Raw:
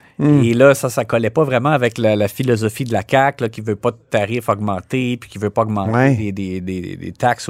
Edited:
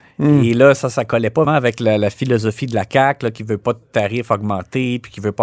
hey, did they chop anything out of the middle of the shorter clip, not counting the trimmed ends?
yes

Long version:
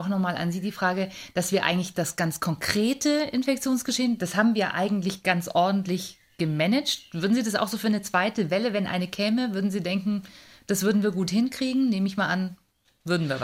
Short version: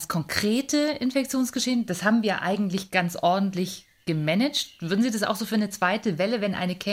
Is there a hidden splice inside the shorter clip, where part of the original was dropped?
no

